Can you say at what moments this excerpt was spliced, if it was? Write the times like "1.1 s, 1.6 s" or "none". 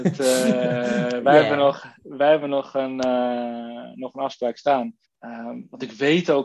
5.0 s